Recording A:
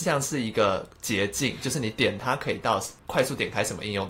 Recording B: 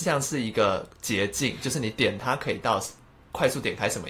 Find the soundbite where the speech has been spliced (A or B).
A